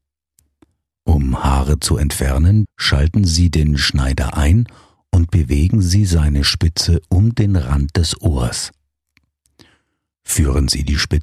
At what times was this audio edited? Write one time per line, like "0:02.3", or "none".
0:02.6